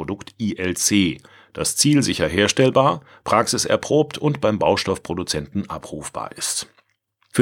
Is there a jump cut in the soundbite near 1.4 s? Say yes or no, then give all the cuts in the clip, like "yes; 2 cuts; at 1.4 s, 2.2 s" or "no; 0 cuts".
no; 0 cuts